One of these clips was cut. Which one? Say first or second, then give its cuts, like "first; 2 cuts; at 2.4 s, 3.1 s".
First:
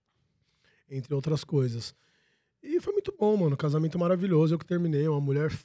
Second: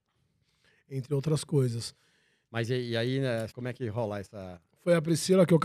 second; 2 cuts; at 2.4 s, 3.5 s